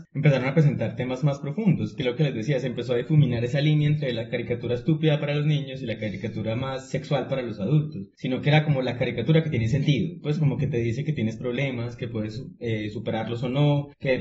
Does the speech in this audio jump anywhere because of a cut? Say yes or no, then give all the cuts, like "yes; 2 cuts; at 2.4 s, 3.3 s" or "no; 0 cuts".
no; 0 cuts